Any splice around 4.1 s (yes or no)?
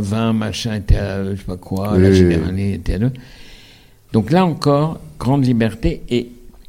yes